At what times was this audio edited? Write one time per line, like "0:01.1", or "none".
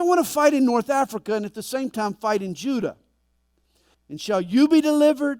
0:03.9